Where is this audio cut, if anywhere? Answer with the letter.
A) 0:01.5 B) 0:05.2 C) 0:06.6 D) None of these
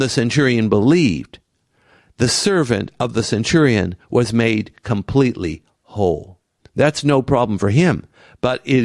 C